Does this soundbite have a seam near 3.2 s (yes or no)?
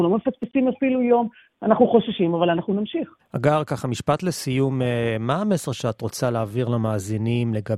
yes